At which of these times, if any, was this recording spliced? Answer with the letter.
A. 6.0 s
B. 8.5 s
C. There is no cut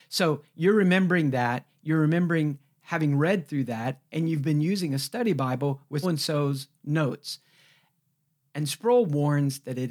A